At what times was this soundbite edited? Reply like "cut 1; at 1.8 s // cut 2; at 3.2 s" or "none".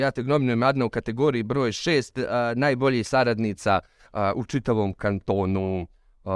none